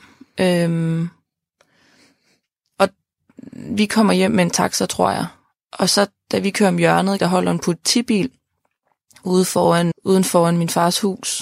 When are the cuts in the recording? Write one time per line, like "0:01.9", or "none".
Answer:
0:07.2
0:09.9

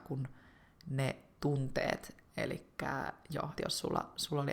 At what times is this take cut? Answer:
0:02.3
0:03.6

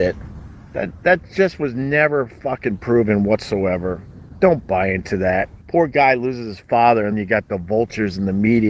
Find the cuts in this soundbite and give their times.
0:05.6
0:07.1

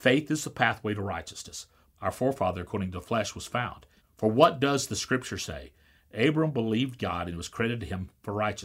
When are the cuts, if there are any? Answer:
0:01.9
0:04.0

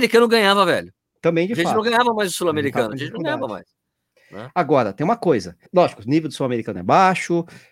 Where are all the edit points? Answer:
0:05.7

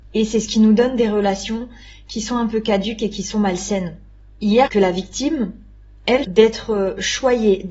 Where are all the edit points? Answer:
0:04.7
0:06.2

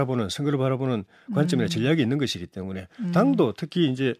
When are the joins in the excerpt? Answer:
none

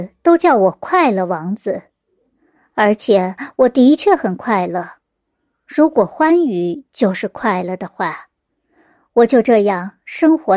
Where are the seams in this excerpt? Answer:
none

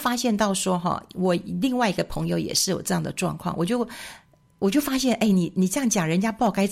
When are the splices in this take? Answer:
none

